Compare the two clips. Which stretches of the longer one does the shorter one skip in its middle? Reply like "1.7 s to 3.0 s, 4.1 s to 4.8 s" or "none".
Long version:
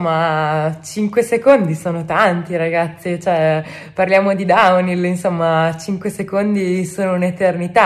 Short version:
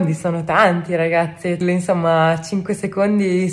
3.2 s to 5.0 s